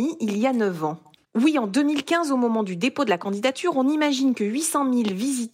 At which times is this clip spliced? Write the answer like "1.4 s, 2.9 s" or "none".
1.2 s